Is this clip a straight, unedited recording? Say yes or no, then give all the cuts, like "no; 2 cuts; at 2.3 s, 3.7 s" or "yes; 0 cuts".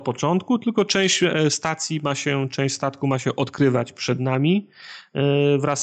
yes; 0 cuts